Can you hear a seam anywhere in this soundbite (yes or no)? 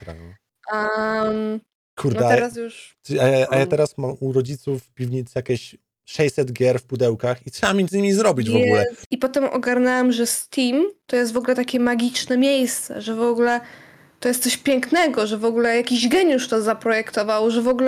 yes